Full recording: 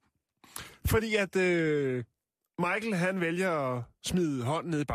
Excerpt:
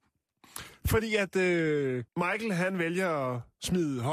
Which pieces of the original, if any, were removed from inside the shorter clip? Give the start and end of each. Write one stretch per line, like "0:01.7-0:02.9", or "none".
0:02.1-0:02.5